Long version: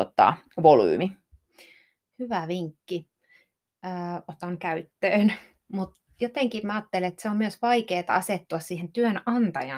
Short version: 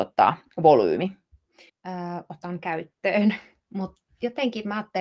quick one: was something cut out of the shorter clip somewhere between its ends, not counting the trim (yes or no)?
yes